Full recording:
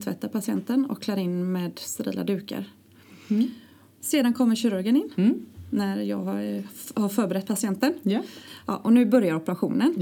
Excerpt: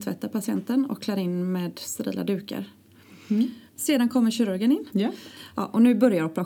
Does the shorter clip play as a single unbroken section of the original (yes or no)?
no